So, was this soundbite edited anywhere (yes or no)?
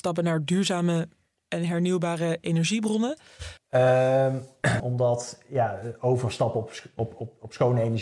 yes